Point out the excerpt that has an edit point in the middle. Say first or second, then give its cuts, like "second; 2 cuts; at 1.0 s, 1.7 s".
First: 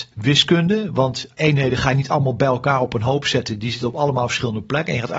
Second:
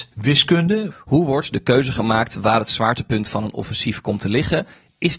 second; 1 cut; at 0.9 s